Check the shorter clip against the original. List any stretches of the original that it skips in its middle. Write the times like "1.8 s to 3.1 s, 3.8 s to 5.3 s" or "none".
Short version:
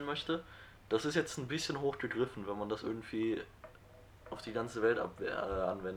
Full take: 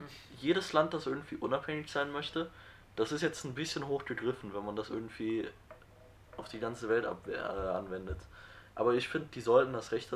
none